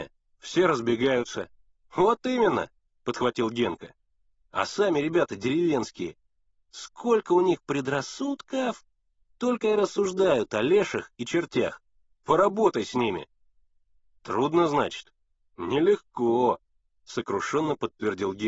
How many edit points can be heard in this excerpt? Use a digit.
1